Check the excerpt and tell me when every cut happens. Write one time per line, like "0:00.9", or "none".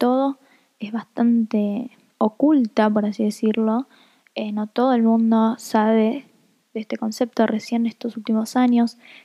none